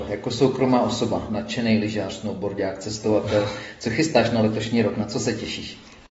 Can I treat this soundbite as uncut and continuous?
yes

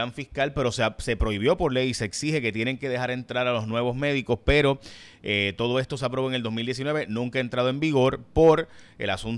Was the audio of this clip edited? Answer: no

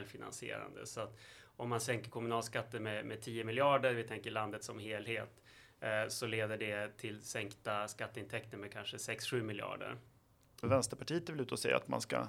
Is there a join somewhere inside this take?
yes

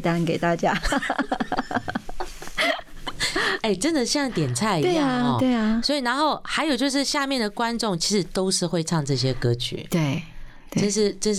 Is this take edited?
no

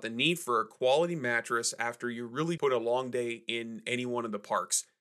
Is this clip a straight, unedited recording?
no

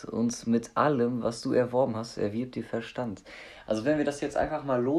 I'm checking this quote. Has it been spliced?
no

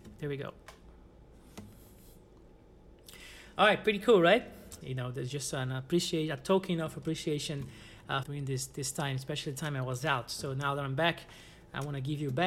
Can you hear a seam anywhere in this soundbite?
yes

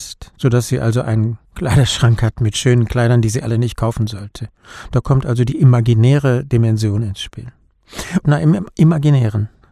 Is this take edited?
yes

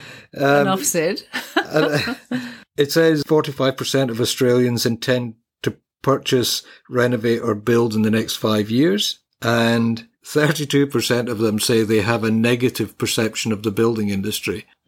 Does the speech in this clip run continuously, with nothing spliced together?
yes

